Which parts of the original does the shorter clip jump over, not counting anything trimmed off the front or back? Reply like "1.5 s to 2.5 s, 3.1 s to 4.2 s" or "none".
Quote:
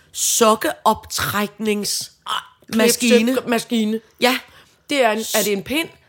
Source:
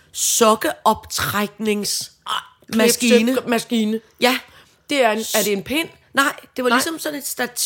none